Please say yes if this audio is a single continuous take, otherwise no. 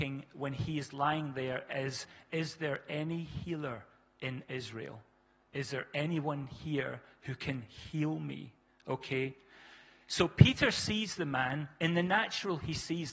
yes